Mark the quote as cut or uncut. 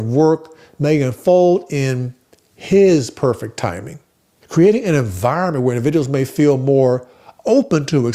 cut